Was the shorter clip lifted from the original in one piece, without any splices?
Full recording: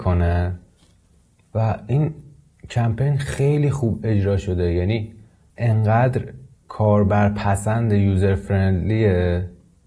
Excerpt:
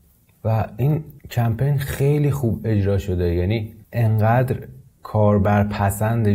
no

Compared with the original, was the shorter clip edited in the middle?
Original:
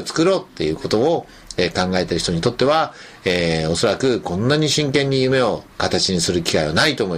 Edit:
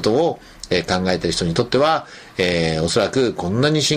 no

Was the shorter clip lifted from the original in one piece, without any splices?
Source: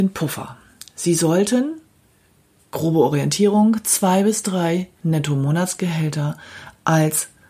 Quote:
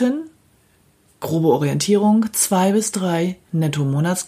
yes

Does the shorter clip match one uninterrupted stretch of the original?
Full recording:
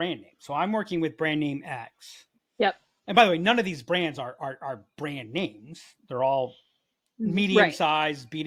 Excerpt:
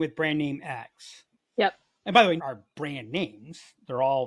no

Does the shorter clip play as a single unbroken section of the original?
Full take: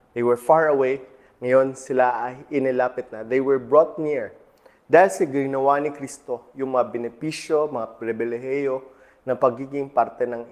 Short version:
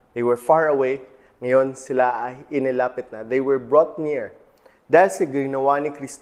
yes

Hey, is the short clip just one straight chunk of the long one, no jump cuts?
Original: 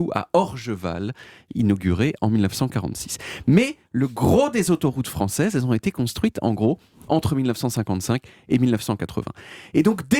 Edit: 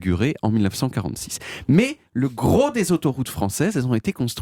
yes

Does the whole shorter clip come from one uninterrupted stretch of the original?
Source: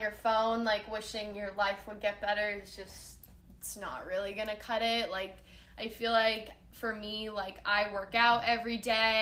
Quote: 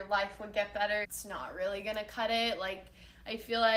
no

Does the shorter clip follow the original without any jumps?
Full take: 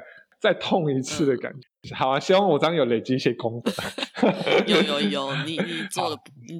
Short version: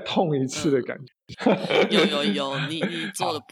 no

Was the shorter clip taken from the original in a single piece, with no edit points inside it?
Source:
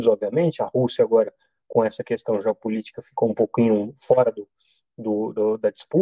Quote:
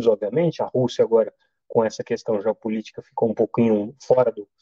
yes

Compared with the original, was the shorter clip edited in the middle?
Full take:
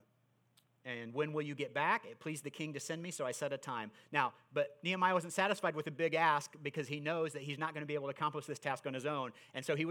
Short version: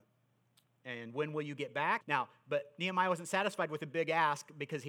yes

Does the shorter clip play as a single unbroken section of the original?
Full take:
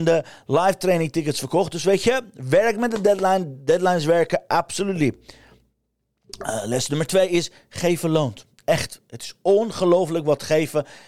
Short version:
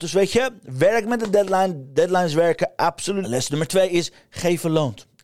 no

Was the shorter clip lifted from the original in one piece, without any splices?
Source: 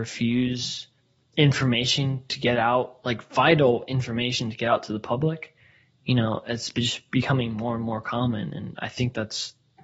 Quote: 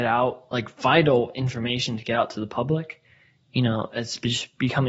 yes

